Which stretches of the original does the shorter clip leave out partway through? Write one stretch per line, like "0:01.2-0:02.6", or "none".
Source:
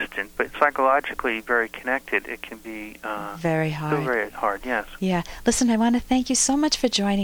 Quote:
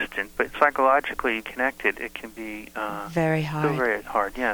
0:01.4-0:01.7